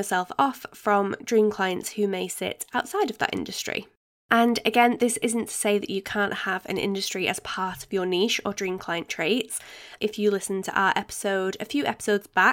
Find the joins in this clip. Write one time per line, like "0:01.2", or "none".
0:10.0